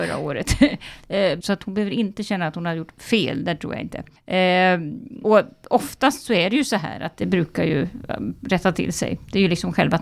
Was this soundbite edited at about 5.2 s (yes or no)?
no